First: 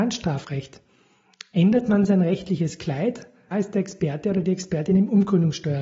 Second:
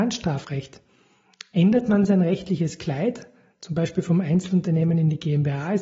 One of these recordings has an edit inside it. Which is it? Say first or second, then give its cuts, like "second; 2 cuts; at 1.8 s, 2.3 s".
first; 1 cut; at 3.5 s